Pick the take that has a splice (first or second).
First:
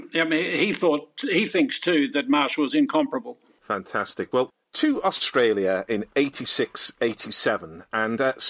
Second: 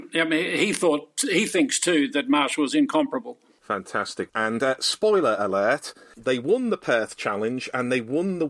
second